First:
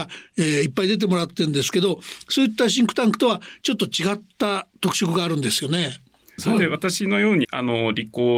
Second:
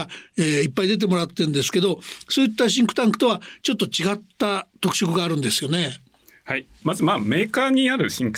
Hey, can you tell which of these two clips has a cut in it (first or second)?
first